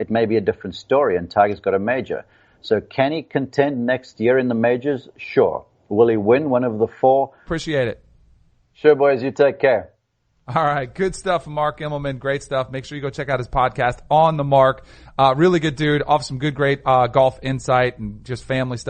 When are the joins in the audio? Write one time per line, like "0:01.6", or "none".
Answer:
0:07.5

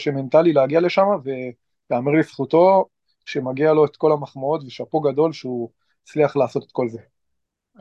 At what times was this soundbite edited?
none

